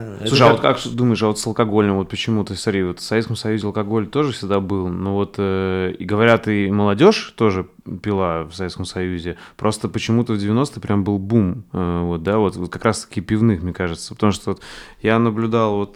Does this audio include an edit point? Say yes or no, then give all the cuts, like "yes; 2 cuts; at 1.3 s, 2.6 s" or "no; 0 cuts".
no; 0 cuts